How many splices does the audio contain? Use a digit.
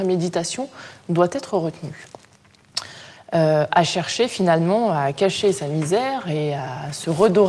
1